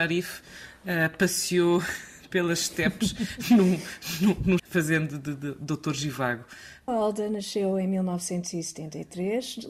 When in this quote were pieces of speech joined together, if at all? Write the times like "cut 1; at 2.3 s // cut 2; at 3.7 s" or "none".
cut 1; at 4.6 s // cut 2; at 6.9 s